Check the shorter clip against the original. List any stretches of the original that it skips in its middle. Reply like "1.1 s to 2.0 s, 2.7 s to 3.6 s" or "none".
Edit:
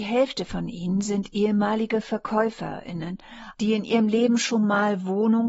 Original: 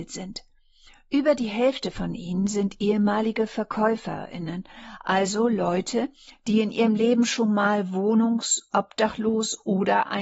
5.0 s to 6.4 s